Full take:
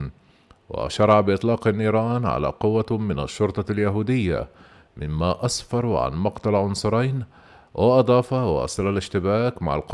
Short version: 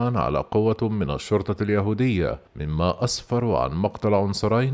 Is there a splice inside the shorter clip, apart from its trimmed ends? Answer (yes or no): yes